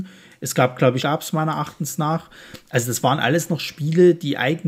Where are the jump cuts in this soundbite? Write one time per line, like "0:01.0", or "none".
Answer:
0:01.0